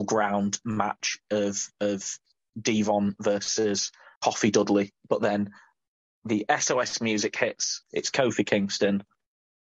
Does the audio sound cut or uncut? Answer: cut